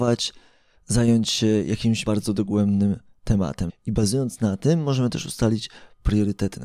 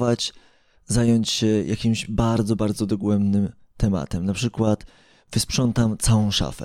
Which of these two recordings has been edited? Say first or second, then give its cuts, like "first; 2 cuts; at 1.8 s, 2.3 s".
first; 2 cuts; at 2.0 s, 3.7 s